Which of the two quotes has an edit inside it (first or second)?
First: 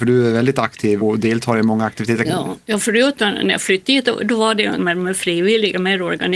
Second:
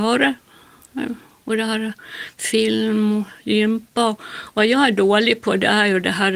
first